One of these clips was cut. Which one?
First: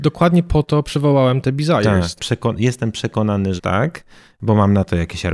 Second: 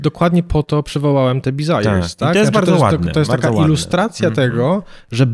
first; 2 cuts; at 2.2 s, 3.6 s

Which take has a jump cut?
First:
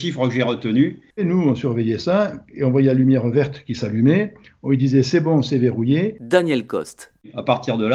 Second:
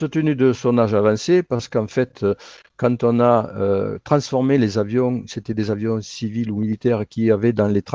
first; 1 cut; at 1.1 s

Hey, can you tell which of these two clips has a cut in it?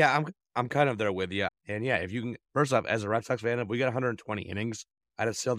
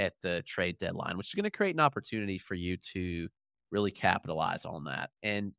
first; 1 cut; at 1.5 s

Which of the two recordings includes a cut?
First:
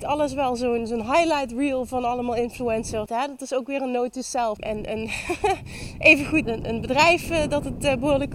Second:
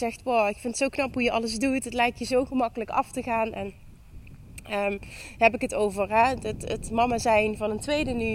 first; 3 cuts; at 3.1 s, 4.6 s, 6.4 s

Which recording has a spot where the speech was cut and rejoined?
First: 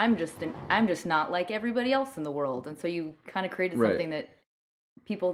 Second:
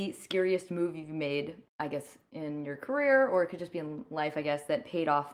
second; 1 cut; at 1.7 s

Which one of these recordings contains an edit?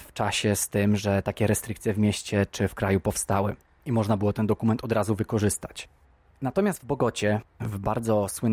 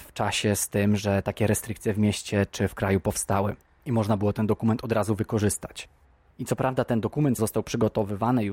second; 2 cuts; at 6.3 s, 7.4 s

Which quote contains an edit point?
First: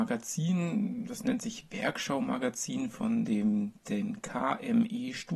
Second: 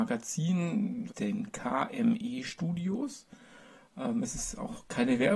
second; 2 cuts; at 1.1 s, 3.7 s

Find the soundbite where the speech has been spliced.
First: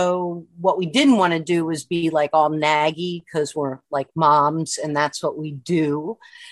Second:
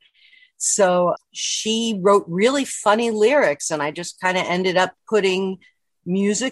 second; 1 cut; at 1.2 s

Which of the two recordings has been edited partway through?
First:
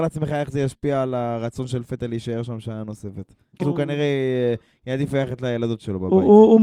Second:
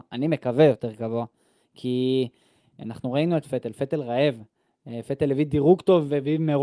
first; 1 cut; at 3.6 s

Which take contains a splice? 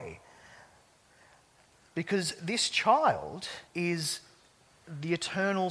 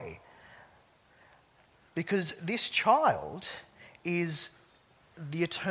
first; 1 cut; at 3.7 s

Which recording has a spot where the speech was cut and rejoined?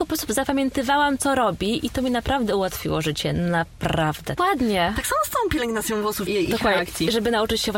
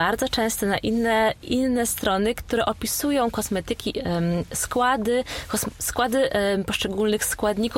first; 3 cuts; at 1.2 s, 4.4 s, 6.3 s

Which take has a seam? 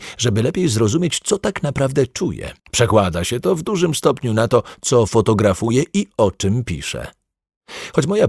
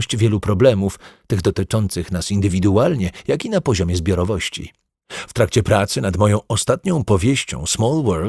first; 1 cut; at 2.6 s

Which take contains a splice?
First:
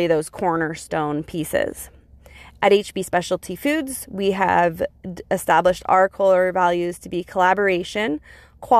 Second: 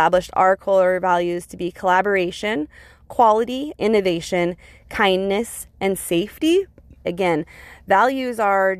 second; 2 cuts; at 3.8 s, 7.0 s

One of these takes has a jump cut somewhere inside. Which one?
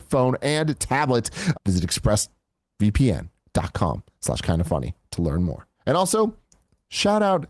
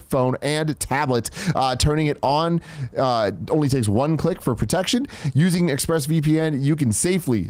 first; 2 cuts; at 1.5 s, 5.7 s

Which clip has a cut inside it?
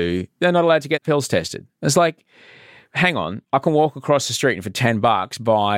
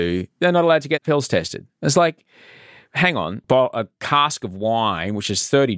second; 1 cut; at 3.4 s

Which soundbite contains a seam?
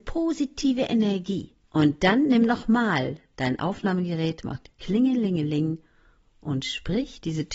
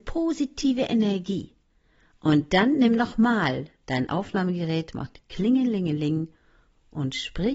first; 1 cut; at 1.6 s

